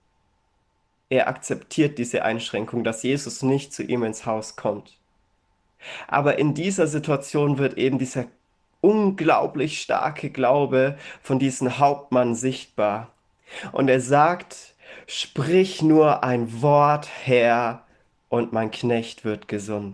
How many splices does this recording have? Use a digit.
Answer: 0